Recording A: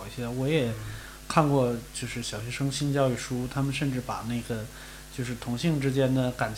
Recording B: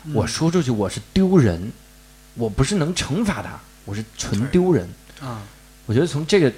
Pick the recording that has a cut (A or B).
A